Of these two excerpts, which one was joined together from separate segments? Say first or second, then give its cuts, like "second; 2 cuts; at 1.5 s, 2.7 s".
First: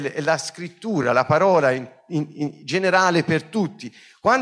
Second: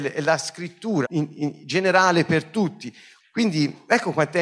second; 2 cuts; at 1.0 s, 3.2 s